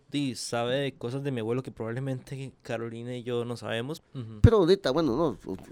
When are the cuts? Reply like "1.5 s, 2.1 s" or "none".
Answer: 4.0 s